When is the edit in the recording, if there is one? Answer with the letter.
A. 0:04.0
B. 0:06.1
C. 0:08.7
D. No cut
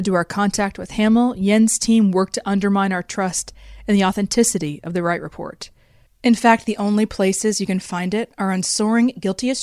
B